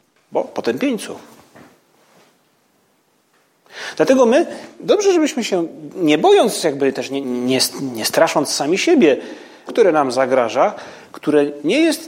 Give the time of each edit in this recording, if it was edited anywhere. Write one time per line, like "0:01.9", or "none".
0:07.2
0:09.7